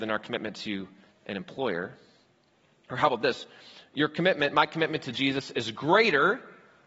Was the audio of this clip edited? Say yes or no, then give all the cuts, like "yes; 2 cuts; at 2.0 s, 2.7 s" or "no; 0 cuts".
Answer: no; 0 cuts